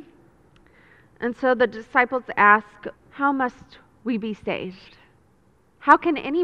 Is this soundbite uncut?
no; 1 cut; at 2.9 s

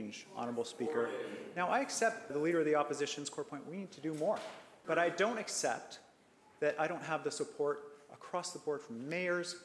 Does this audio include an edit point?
yes; 2 cuts; at 2.3 s, 4.8 s

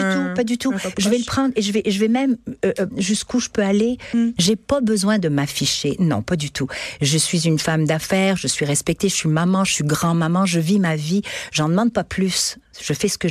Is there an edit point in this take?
yes; 2 cuts; at 2.9 s, 4.4 s

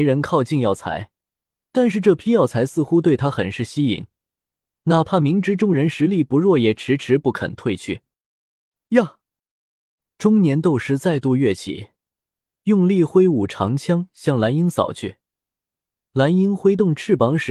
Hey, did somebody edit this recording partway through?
no; 0 cuts

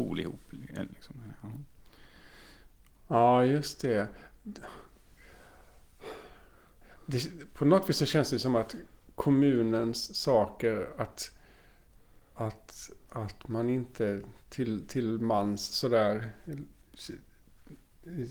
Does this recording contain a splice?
no; 0 cuts

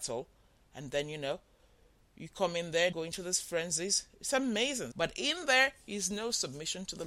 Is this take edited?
yes; 2 cuts; at 2.9 s, 4.9 s

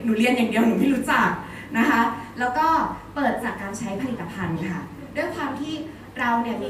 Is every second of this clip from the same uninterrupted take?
no; 1 cut; at 3.4 s

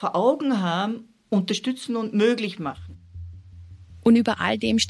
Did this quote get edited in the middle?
no; 0 cuts

